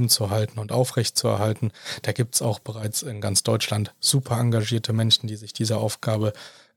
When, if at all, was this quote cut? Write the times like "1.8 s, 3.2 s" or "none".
none